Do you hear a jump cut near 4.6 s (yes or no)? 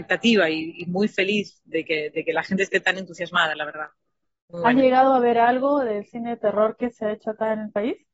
no